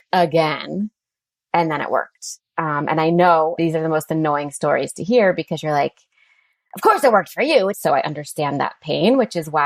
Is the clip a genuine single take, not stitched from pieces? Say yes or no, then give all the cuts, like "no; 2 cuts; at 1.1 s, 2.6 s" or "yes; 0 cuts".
no; 2 cuts; at 3.6 s, 7.7 s